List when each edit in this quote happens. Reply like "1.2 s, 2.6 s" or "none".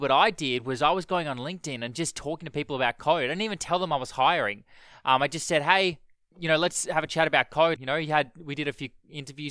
6.3 s, 7.8 s